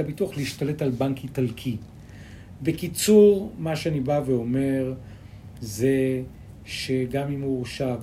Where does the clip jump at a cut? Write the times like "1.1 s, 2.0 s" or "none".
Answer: none